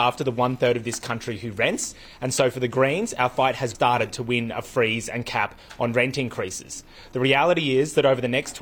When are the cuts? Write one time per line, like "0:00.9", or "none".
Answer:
0:03.7